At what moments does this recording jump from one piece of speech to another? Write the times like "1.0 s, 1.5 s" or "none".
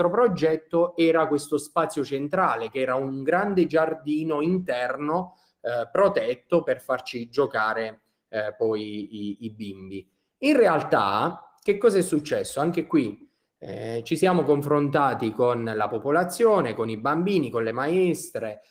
none